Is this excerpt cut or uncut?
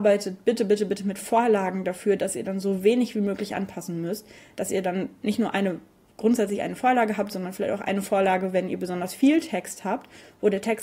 uncut